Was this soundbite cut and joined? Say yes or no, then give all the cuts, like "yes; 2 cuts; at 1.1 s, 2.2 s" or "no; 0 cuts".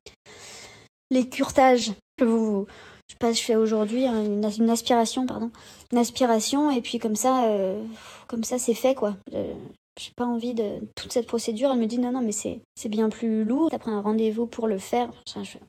yes; 3 cuts; at 2.2 s, 12.6 s, 13.7 s